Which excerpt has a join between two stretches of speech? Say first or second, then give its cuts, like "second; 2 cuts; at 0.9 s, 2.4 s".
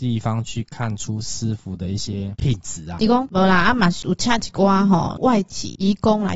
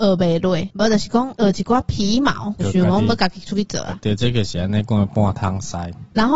first; 1 cut; at 3.0 s